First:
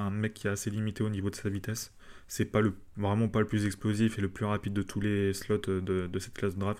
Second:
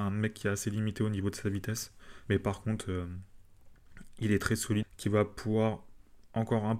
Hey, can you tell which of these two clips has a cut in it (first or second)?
second